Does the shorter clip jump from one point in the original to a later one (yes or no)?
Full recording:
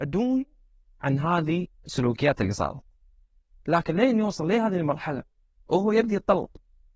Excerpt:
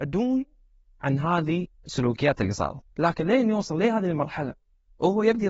yes